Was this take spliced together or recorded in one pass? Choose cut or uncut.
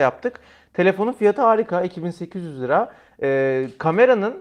uncut